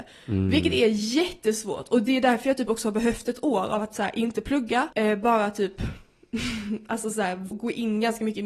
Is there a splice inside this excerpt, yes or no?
yes